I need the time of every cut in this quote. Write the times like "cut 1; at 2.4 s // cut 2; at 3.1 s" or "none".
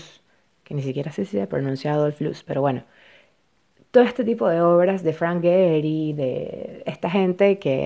none